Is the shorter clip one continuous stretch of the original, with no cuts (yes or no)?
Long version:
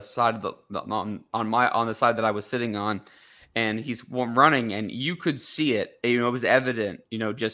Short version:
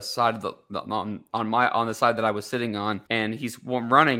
no